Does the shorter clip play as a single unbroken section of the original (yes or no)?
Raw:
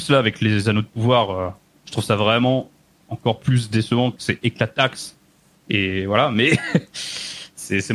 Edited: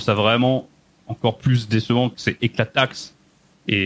yes